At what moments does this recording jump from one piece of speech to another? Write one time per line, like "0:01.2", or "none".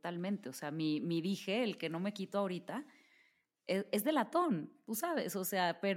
none

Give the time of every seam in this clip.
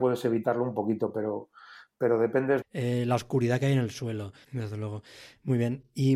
0:02.6
0:04.4

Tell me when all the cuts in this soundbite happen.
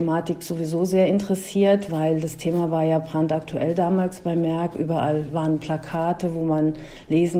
none

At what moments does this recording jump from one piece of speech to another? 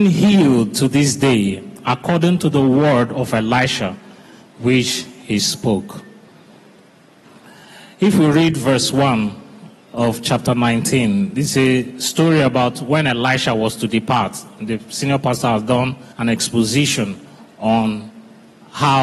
0:16.1

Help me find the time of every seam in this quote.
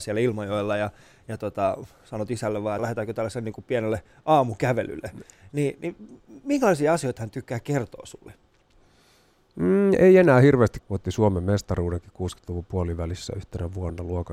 0:02.8
0:10.8

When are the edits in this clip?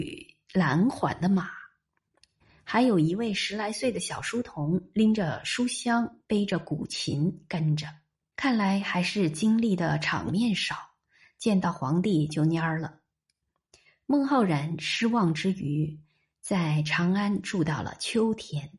0:08.3

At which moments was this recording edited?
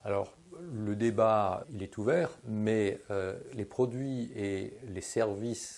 0:01.6

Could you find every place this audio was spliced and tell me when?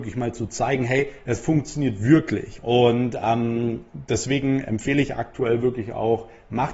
0:02.6

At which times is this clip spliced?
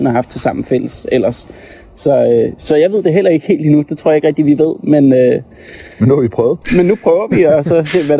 none

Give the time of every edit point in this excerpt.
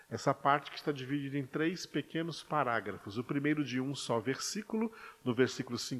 none

